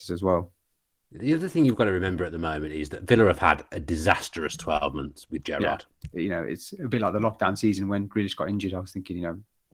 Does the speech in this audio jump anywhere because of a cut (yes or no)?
yes